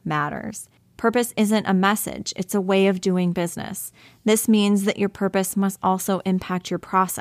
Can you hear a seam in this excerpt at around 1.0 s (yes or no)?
yes